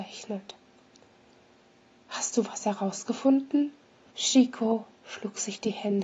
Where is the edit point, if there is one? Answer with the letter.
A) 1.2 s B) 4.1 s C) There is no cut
B